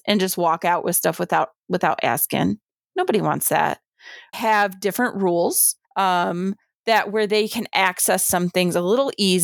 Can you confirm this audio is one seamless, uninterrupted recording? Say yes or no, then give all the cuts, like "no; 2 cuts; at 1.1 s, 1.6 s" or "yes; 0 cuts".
no; 2 cuts; at 4.3 s, 5.8 s